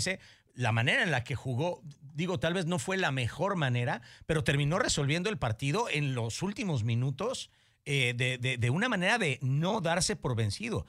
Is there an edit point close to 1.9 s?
no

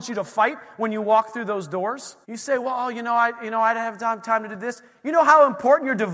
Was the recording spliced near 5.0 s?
no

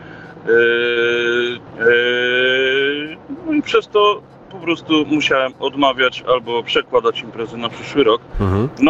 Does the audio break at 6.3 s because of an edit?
no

